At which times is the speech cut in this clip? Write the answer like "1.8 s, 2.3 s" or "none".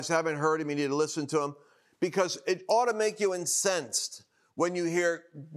none

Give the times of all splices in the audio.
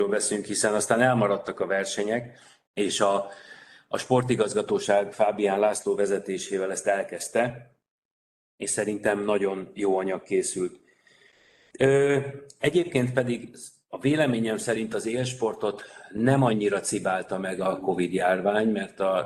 none

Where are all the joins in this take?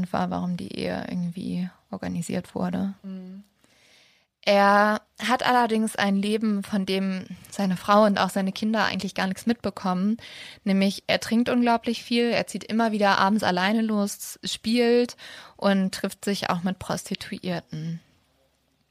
none

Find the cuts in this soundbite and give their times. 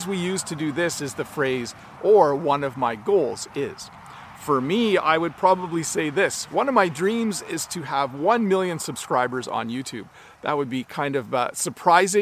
2.0 s

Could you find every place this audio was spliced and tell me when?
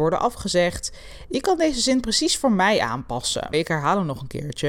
1.3 s, 3.5 s

